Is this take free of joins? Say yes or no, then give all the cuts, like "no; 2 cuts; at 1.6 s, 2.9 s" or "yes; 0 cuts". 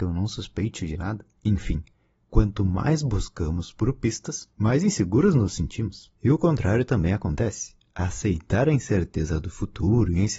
yes; 0 cuts